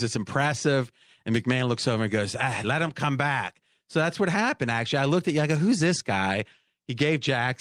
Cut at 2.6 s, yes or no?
yes